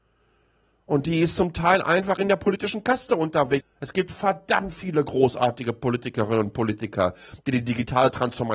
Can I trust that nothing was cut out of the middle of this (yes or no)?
no